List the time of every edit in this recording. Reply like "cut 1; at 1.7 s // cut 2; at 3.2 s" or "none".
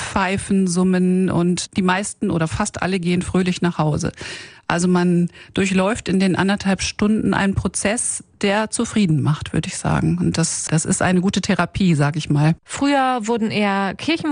cut 1; at 10.7 s // cut 2; at 12.6 s